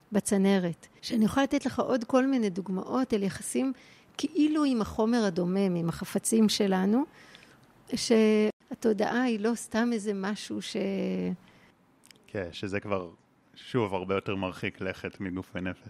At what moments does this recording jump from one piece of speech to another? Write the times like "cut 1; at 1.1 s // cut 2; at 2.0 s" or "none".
cut 1; at 1.0 s